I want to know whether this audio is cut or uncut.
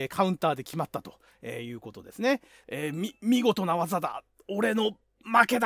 cut